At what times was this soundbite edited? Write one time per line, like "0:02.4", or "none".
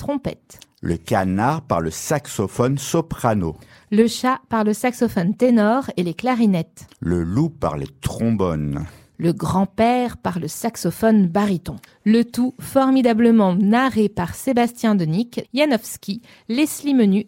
0:11.9
0:15.4